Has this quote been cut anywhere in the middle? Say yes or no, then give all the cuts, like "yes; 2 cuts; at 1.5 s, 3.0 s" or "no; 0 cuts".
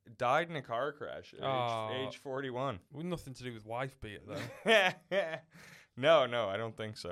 yes; 1 cut; at 2.9 s